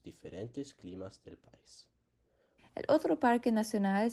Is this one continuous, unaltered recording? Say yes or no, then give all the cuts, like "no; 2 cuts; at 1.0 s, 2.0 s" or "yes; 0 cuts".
no; 1 cut; at 2.6 s